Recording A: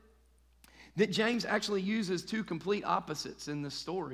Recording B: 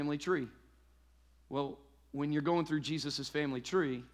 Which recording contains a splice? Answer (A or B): B